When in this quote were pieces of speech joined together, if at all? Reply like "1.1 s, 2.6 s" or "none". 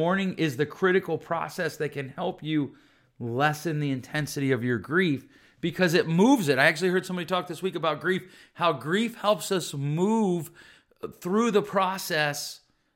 none